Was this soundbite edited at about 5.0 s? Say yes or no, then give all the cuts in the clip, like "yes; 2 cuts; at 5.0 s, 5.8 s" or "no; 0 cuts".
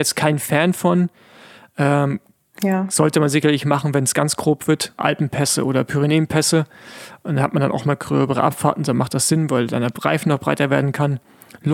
yes; 1 cut; at 5.0 s